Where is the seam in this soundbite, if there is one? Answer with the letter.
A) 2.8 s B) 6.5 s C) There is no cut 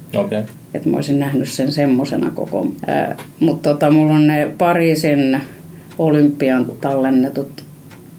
A